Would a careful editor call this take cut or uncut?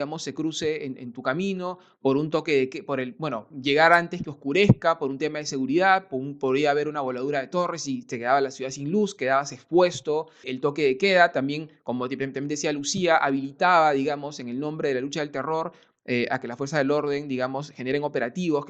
cut